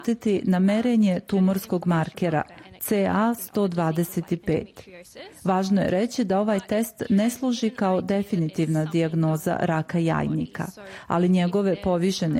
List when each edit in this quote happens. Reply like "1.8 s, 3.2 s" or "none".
none